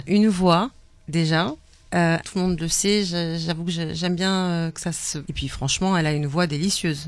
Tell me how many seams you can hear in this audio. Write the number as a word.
two